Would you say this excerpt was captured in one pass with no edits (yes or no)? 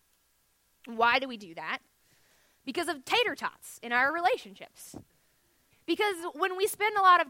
no